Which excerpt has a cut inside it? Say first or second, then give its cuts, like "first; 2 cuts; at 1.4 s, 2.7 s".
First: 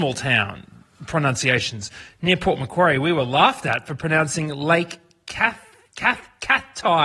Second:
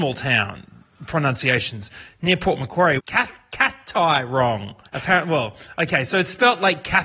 second; 2 cuts; at 3.0 s, 4.9 s